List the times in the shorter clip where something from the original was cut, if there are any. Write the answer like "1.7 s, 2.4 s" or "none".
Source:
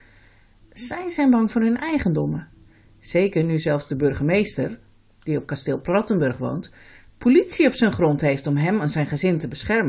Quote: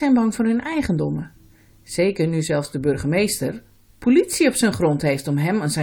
3.9 s